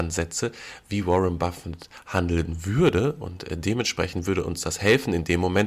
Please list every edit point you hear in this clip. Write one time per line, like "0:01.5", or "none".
none